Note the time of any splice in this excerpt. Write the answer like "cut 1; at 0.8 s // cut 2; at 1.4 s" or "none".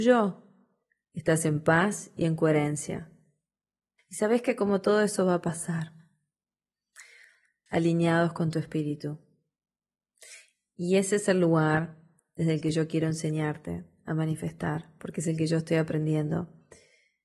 cut 1; at 4.0 s // cut 2; at 7.7 s